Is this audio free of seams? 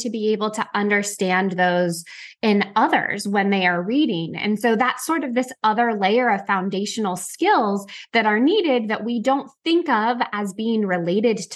yes; 0 cuts

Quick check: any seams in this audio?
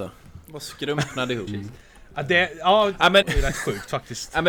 yes; 2 cuts; at 1.5 s, 3.2 s

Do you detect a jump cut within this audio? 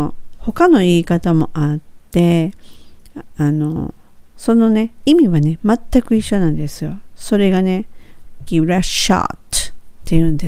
yes; 2 cuts; at 4.3 s, 8.5 s

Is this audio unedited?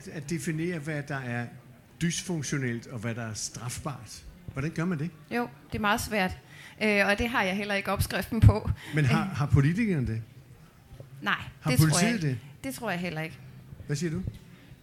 yes; 0 cuts

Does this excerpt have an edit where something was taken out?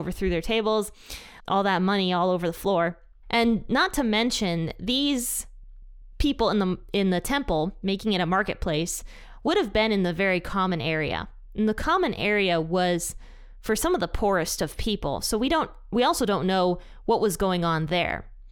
yes; 1 cut; at 1.4 s

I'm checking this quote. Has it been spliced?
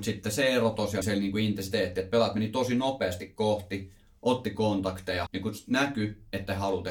yes; 2 cuts; at 1.0 s, 5.3 s

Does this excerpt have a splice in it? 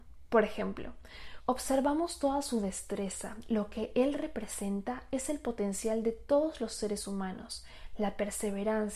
yes; 1 cut; at 1.4 s

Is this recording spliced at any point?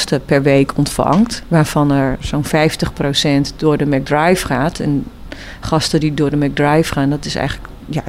no; 0 cuts

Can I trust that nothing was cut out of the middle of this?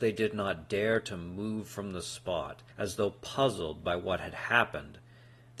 no; 1 cut; at 2.7 s

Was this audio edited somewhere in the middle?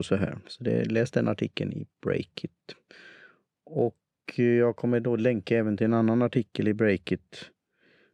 no; 0 cuts

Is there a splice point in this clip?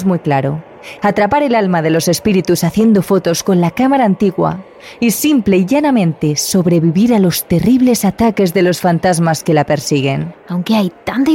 yes; 2 cuts; at 1.0 s, 10.3 s

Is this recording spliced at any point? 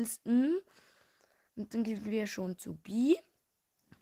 yes; 1 cut; at 1.5 s

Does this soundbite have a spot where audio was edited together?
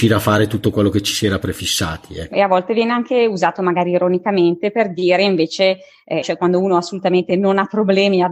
yes; 2 cuts; at 2.3 s, 6.2 s

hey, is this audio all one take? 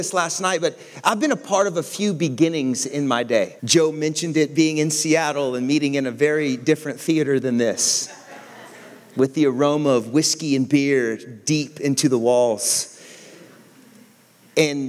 no; 1 cut; at 3.6 s

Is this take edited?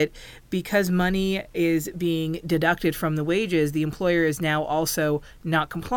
no; 0 cuts

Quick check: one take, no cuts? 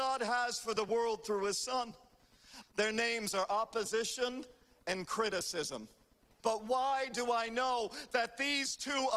no; 2 cuts; at 2.6 s, 6.4 s

